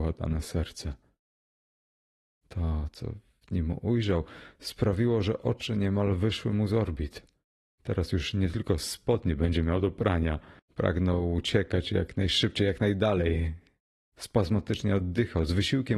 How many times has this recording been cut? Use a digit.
2